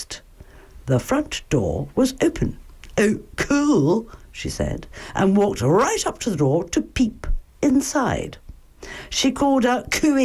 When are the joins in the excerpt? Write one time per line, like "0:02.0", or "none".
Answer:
none